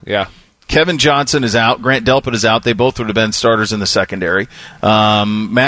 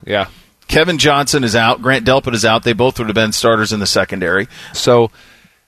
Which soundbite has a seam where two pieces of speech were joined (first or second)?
second